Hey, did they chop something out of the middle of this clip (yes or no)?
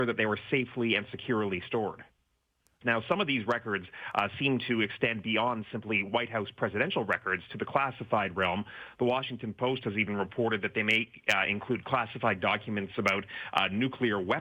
yes